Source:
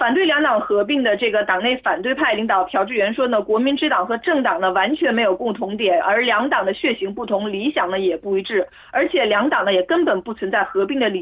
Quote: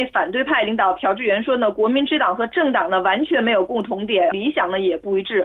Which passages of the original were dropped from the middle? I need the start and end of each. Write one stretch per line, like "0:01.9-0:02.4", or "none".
0:06.0-0:07.5